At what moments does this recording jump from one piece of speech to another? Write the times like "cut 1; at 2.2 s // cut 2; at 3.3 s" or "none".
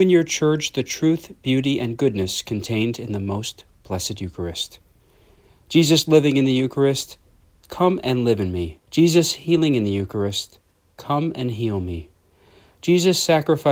cut 1; at 8.8 s